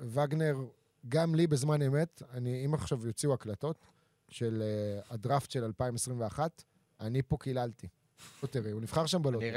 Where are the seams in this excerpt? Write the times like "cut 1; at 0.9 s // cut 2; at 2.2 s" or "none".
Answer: cut 1; at 8.4 s